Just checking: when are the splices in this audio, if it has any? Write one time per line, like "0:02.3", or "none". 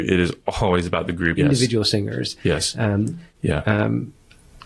0:01.4
0:03.3